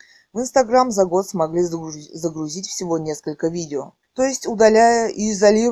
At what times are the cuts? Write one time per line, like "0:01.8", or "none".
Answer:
0:04.0